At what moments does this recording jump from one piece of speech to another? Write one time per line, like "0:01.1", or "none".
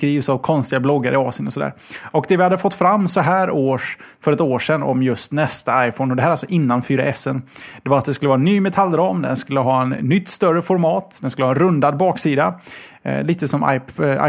none